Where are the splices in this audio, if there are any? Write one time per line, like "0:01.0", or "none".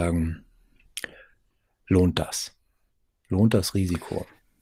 none